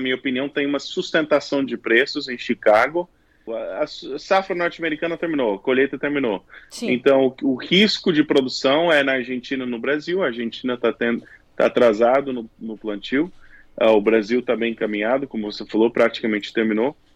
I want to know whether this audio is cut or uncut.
cut